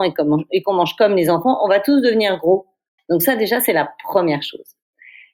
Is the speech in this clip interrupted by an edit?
yes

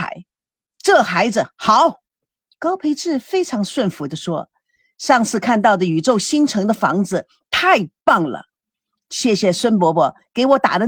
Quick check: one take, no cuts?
yes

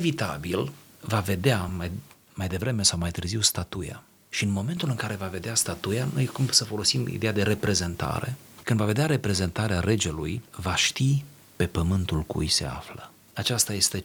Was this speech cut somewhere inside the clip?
no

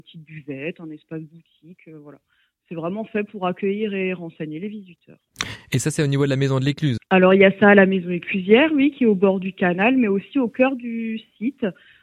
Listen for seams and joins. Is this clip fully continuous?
no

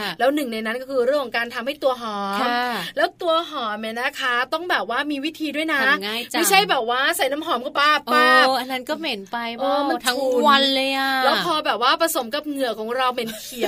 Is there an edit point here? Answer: yes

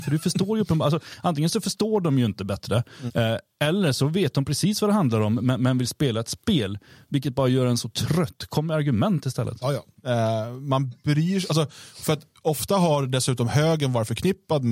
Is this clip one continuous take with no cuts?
no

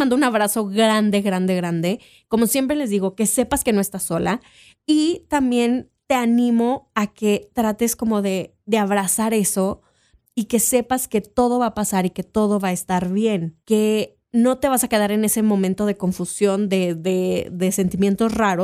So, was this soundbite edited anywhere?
no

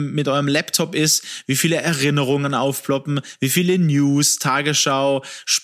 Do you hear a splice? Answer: no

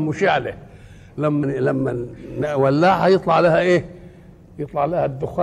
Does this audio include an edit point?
yes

